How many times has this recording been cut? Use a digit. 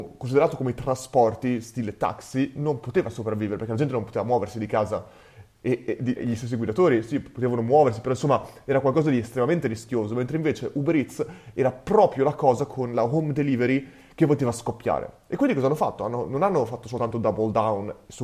1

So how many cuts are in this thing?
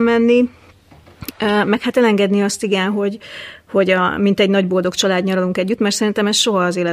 0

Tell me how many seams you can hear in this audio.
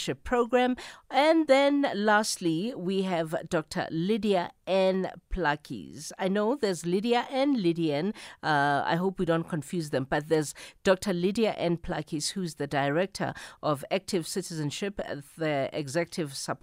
0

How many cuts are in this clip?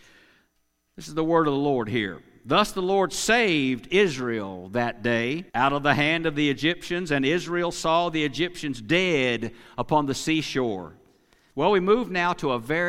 2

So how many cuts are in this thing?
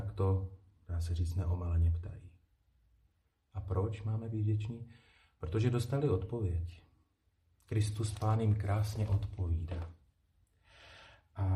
0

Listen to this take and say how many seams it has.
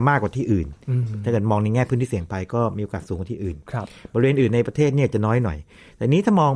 0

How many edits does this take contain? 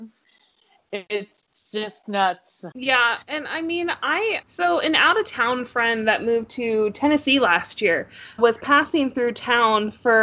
3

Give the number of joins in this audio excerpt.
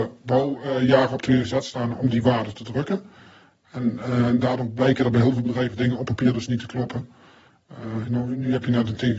1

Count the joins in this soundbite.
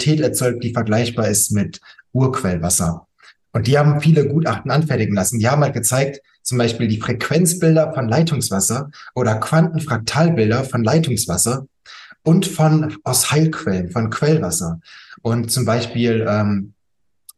1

